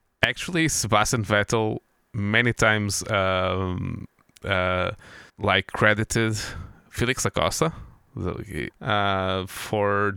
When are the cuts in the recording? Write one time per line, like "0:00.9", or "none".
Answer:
0:05.3
0:08.7